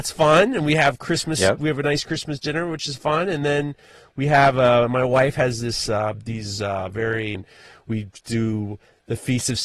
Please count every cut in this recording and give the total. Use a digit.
1